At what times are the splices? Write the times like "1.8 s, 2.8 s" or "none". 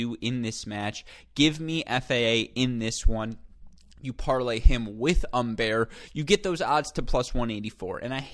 none